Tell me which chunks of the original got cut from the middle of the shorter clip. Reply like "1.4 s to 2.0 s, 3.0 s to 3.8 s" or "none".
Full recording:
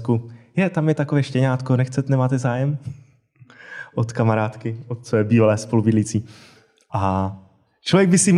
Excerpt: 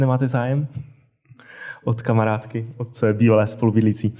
none